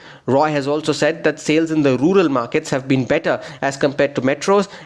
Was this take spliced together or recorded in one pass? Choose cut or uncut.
uncut